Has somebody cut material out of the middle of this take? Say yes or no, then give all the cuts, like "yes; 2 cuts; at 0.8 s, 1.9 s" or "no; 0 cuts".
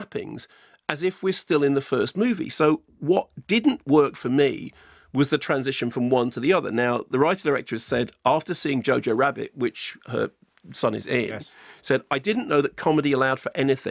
no; 0 cuts